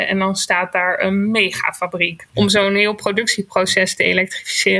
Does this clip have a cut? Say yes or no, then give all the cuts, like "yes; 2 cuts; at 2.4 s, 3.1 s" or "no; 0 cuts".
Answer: yes; 1 cut; at 2.3 s